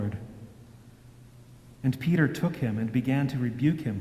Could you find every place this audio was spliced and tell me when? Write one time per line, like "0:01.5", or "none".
0:01.7